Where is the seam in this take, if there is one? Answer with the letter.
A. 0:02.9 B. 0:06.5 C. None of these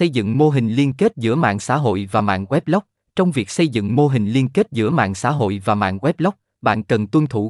C